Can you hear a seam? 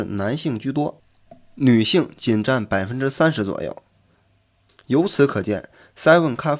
yes; 1 cut; at 4.7 s

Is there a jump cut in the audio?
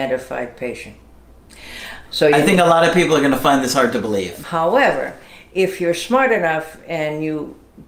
yes; 2 cuts; at 2.1 s, 4.4 s

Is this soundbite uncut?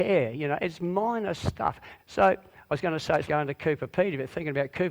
no; 2 cuts; at 2.0 s, 3.3 s

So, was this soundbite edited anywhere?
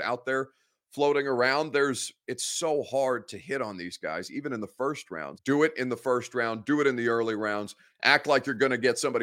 yes; 1 cut; at 5.4 s

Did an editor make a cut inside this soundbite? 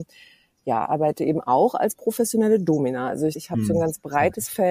yes; 1 cut; at 3.3 s

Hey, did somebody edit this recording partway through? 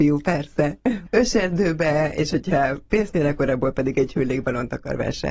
no; 0 cuts

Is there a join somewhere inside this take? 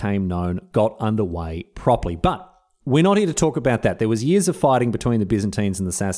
no; 0 cuts

